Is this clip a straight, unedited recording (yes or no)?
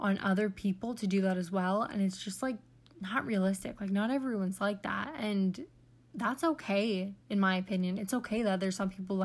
yes